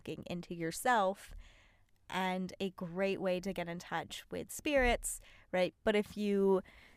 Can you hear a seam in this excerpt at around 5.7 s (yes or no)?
yes